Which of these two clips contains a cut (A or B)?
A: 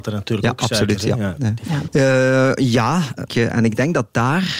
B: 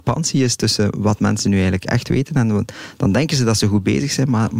A